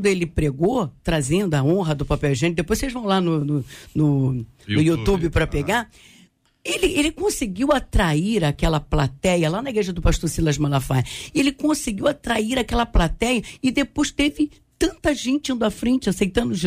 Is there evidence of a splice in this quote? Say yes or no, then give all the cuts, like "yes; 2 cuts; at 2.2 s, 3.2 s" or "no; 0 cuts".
no; 0 cuts